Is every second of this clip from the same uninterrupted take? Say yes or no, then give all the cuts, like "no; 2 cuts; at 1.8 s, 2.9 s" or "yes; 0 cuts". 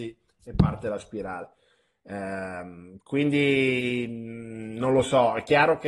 yes; 0 cuts